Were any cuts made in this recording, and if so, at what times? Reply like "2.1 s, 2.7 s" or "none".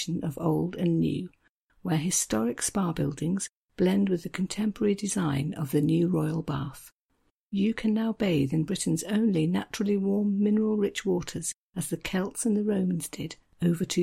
none